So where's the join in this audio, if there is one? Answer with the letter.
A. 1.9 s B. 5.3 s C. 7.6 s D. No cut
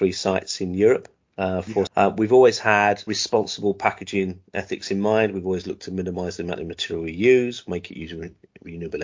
A